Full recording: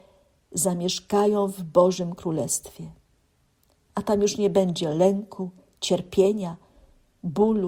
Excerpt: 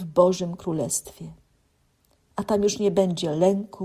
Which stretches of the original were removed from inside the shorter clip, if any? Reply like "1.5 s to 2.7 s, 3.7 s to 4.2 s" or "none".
none